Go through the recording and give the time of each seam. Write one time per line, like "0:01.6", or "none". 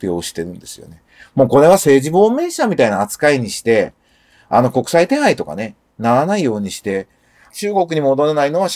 none